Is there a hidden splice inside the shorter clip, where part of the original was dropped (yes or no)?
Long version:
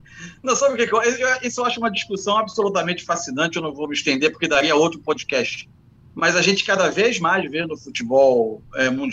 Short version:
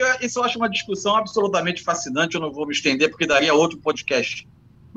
no